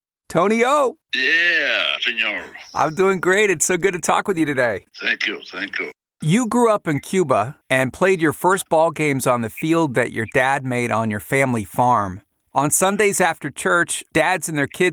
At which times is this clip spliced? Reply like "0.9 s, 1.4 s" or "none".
2.0 s